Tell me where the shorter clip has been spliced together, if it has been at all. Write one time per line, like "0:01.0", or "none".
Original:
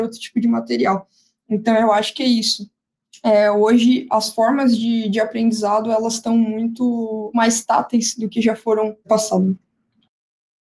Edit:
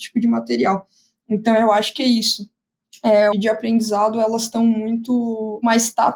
0:03.3